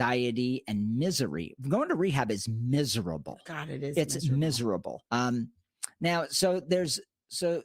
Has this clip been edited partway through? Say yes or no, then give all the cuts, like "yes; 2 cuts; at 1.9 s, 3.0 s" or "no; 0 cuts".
yes; 1 cut; at 5.1 s